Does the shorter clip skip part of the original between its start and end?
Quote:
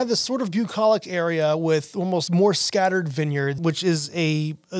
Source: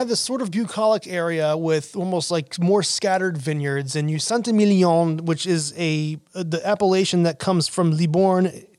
yes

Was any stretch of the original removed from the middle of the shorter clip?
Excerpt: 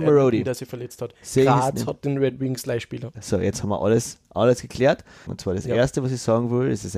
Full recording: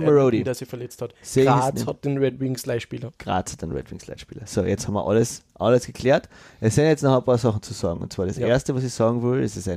yes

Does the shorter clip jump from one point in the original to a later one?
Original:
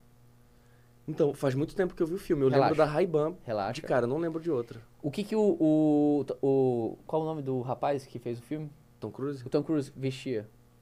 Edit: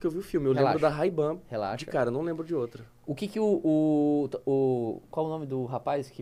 no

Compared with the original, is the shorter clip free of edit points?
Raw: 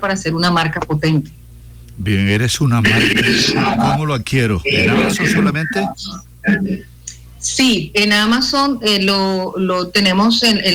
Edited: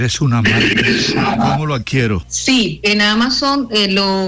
no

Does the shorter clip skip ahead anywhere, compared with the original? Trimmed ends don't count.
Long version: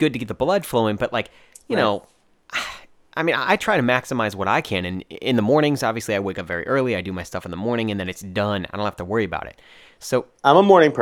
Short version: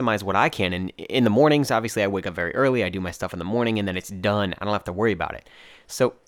no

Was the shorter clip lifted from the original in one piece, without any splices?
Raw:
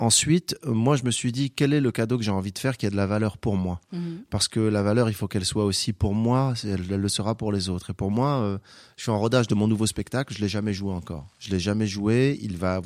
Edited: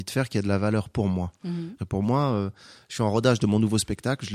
no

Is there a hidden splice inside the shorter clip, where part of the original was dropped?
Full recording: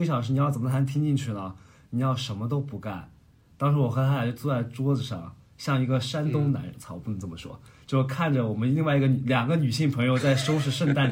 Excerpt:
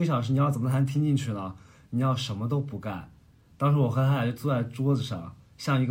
no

